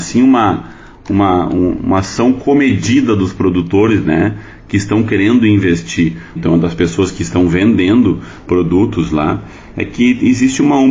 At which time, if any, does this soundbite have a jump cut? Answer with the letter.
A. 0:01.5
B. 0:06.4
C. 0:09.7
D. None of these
B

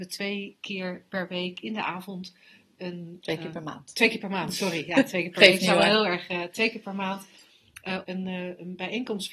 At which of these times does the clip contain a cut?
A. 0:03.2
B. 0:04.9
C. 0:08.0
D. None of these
C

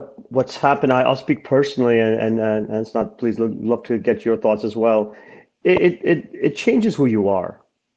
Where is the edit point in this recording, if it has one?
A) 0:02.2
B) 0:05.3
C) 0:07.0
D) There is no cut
D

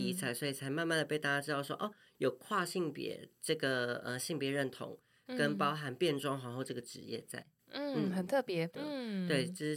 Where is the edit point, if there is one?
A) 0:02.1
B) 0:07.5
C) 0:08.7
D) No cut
C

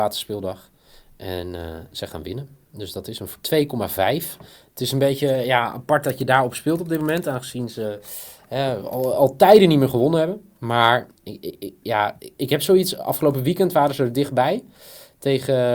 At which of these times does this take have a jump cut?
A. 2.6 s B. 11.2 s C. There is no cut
B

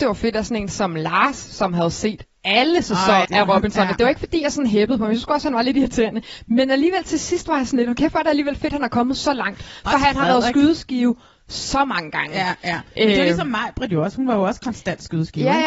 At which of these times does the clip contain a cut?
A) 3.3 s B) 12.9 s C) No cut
A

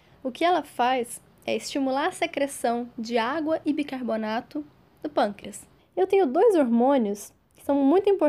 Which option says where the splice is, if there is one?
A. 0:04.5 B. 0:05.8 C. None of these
B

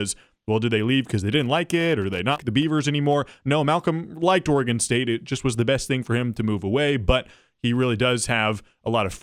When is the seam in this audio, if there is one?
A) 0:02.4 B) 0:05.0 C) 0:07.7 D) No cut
A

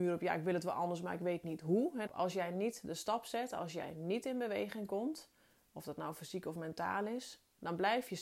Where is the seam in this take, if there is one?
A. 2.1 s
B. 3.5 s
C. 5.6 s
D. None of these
A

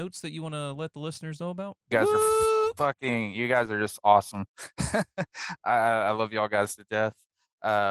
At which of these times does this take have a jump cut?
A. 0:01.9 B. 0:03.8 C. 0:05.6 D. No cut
A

